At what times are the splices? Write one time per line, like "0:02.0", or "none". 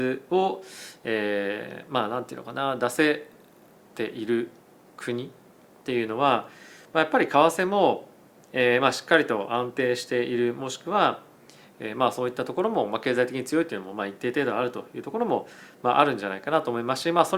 none